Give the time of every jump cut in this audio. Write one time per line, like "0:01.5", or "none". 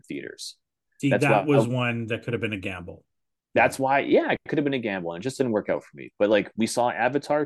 none